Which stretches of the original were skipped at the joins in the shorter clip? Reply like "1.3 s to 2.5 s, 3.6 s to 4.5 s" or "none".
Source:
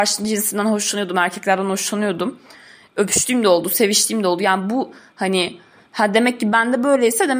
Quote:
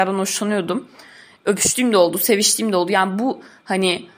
none